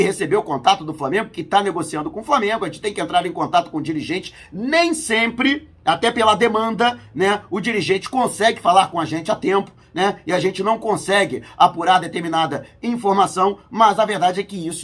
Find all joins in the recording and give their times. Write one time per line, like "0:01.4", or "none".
none